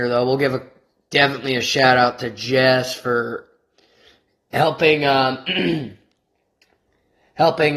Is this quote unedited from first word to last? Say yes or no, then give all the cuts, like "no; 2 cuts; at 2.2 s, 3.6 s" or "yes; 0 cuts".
yes; 0 cuts